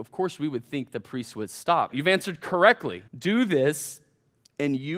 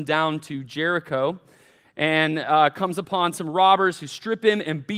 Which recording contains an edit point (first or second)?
first